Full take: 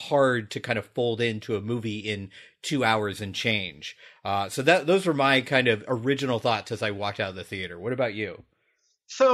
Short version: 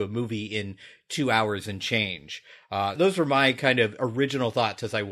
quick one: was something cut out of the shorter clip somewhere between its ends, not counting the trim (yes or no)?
yes